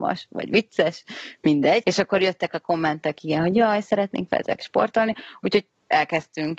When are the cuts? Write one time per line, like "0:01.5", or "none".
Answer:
0:01.8